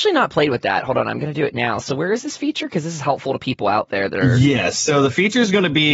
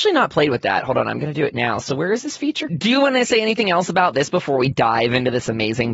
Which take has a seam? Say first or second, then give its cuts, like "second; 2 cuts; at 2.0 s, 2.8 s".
second; 1 cut; at 2.7 s